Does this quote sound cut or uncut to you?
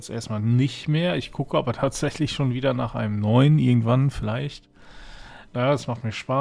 cut